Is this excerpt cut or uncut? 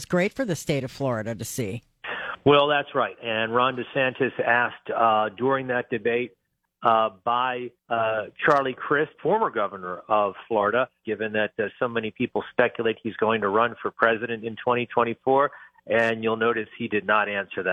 cut